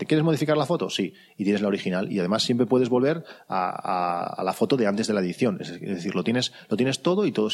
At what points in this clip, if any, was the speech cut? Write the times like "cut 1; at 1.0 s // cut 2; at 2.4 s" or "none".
none